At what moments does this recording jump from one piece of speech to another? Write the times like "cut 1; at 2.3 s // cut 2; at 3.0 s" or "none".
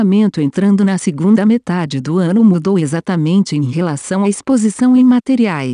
none